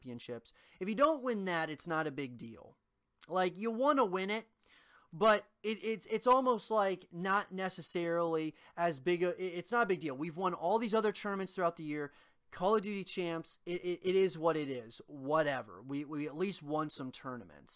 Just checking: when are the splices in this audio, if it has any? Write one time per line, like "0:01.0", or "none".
none